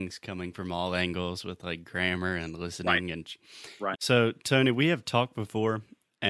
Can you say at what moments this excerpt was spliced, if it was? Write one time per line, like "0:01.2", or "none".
0:03.9